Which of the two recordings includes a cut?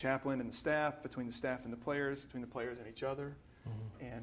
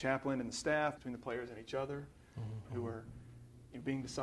second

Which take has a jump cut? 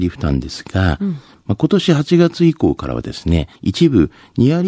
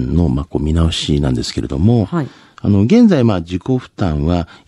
first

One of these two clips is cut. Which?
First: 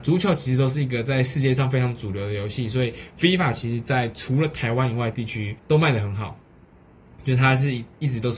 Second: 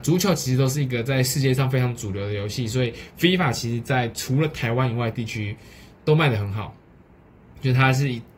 first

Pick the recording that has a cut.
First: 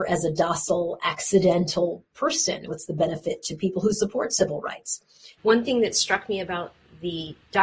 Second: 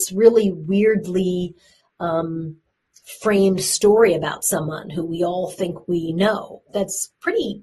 first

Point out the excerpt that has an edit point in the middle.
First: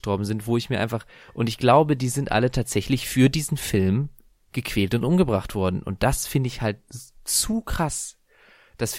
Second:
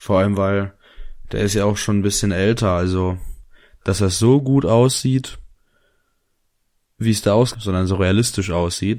second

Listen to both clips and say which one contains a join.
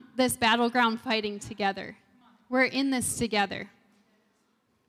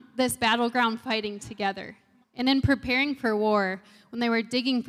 second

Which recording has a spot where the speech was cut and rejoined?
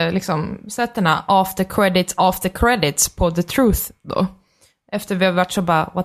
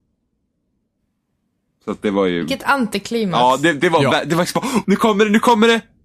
second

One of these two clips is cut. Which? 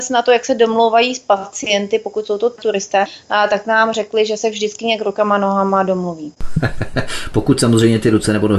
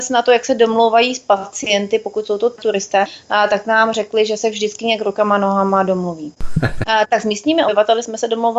second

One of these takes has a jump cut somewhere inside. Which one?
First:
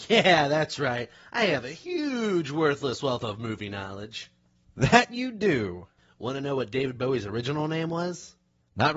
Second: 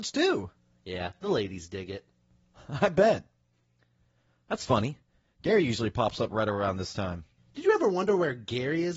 second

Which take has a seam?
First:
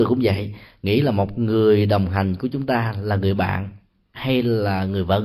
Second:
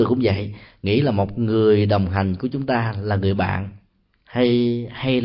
first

